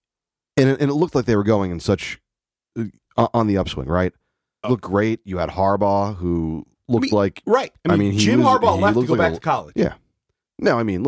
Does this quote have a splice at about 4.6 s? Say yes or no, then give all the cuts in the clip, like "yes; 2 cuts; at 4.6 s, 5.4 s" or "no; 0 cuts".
yes; 1 cut; at 4.6 s